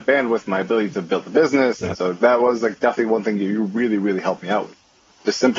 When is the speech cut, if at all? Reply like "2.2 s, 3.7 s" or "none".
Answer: 1.9 s